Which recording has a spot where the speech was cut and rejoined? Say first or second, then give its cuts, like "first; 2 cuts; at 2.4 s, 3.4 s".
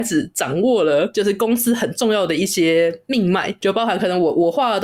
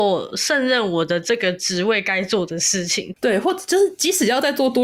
second; 1 cut; at 3.1 s